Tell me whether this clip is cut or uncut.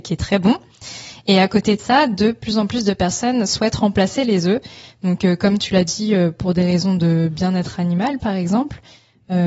uncut